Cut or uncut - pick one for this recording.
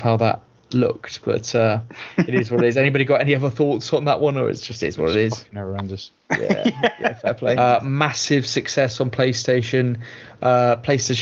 cut